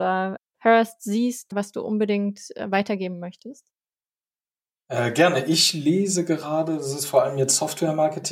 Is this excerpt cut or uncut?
uncut